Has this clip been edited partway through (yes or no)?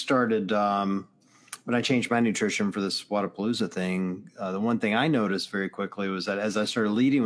no